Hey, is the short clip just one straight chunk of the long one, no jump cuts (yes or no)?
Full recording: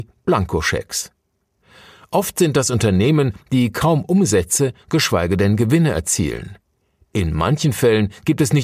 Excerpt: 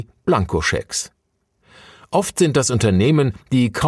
yes